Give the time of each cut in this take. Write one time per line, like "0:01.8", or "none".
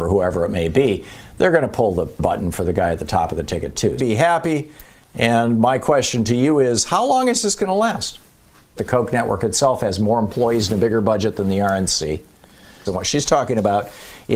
0:04.0
0:08.8
0:12.9